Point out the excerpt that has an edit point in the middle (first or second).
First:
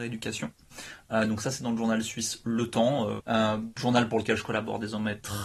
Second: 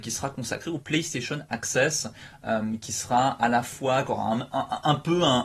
first